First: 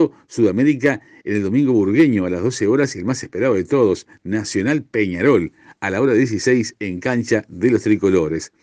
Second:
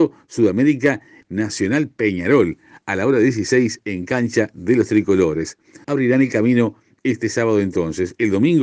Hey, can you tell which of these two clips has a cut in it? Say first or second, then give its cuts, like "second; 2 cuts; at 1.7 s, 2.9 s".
second; 2 cuts; at 1.2 s, 5.8 s